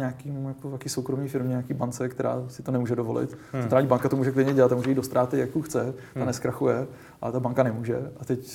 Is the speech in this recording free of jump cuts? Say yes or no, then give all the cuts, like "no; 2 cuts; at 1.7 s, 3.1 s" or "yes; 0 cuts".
yes; 0 cuts